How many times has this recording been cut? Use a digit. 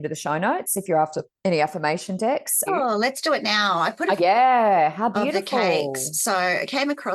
2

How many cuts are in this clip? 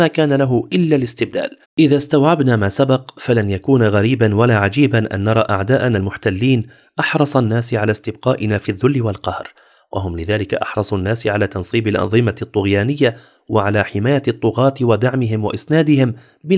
1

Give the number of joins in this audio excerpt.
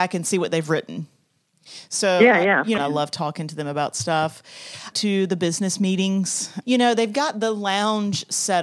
3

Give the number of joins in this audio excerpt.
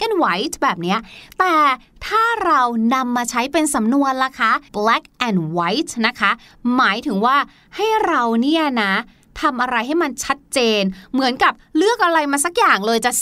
1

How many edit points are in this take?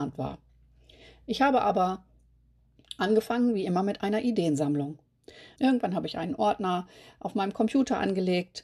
1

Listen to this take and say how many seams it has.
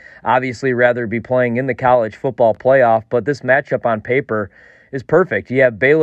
0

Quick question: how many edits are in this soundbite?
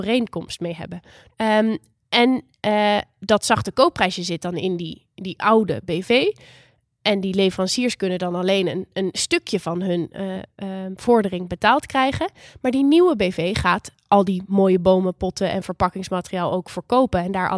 2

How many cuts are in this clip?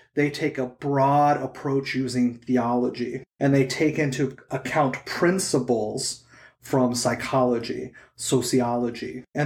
0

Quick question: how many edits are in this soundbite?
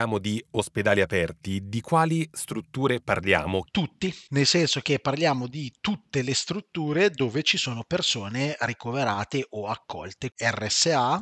2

